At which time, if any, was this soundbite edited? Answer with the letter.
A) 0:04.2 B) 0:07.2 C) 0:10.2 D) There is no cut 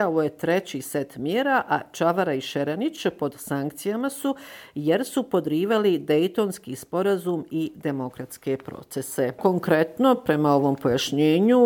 D